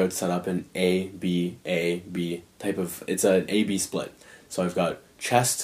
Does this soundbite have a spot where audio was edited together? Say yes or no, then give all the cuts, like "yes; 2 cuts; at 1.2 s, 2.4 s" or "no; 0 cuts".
no; 0 cuts